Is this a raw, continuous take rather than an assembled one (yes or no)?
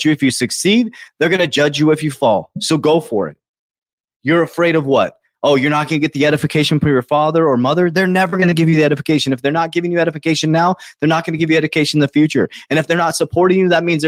yes